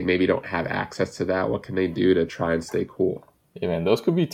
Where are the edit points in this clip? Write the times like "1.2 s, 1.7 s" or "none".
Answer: none